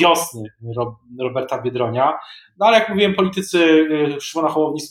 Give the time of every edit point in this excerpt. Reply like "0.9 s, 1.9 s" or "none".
none